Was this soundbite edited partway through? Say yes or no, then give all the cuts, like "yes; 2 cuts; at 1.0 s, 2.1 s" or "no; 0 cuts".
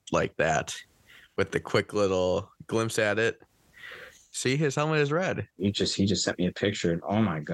yes; 1 cut; at 5.5 s